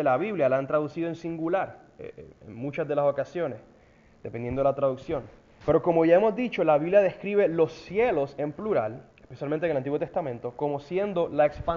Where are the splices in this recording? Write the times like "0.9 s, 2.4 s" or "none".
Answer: 5.6 s, 9.1 s